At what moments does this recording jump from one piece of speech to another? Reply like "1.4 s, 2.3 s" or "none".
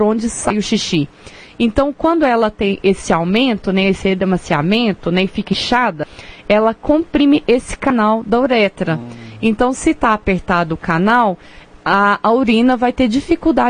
none